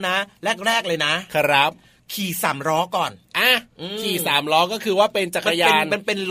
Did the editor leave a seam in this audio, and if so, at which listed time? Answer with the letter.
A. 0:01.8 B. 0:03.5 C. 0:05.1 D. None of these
D